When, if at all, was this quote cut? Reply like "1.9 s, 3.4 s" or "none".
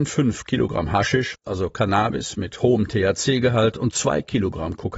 1.4 s